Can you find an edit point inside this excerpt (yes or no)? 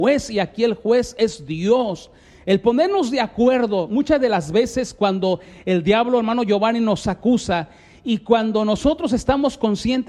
no